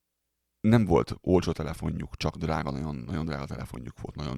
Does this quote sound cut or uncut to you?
uncut